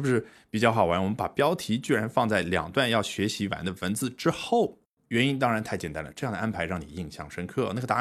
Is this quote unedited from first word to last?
yes; 0 cuts

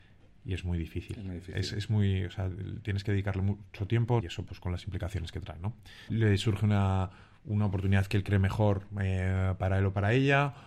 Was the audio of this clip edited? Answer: yes; 2 cuts; at 4.2 s, 6.1 s

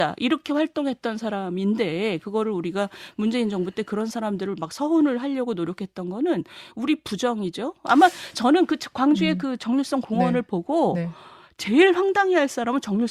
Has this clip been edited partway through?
no; 0 cuts

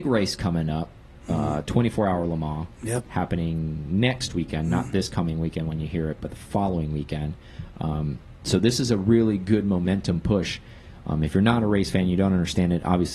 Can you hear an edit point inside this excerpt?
no; 0 cuts

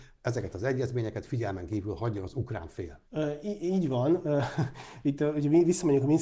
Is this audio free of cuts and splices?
no; 1 cut; at 3.0 s

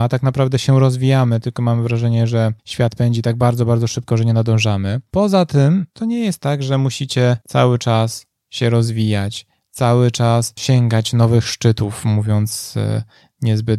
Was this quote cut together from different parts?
no; 0 cuts

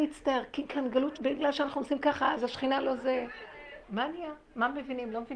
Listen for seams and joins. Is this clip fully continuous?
no; 2 cuts; at 1.2 s, 3.8 s

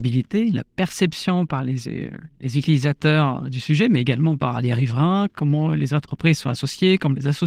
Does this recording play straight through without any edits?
yes; 0 cuts

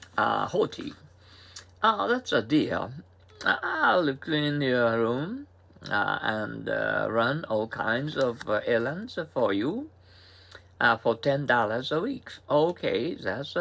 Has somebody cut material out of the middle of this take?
no; 0 cuts

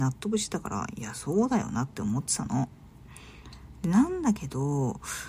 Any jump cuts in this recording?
no; 0 cuts

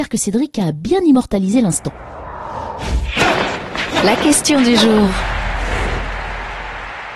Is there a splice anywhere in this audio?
no; 0 cuts

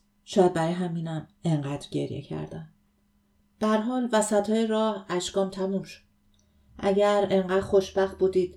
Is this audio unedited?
yes; 0 cuts

